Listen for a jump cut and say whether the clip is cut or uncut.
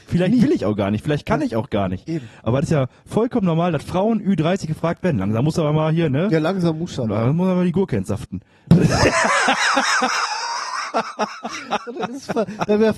uncut